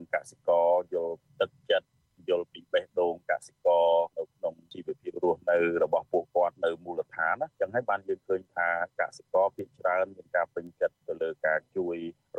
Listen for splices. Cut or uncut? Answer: uncut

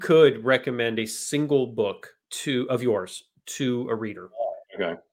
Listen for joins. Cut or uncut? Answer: cut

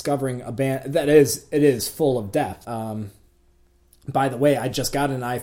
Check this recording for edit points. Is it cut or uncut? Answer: cut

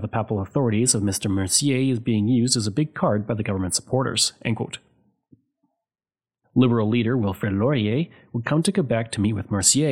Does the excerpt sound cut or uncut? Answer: cut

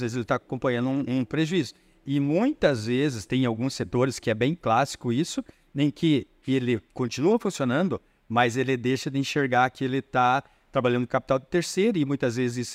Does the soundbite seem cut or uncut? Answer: uncut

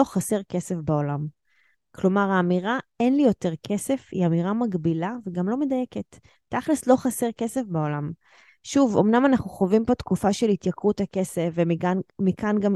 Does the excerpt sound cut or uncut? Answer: uncut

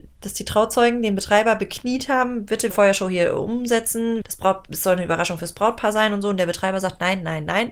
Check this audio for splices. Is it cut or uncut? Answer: cut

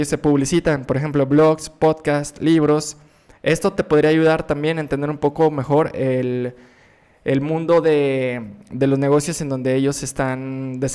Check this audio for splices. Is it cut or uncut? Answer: uncut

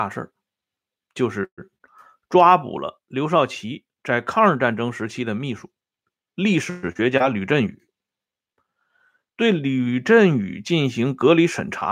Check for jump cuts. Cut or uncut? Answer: uncut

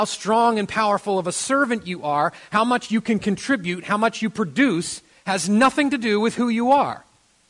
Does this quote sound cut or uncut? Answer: uncut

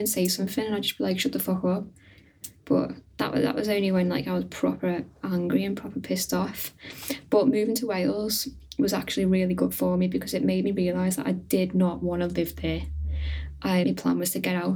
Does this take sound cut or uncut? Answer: cut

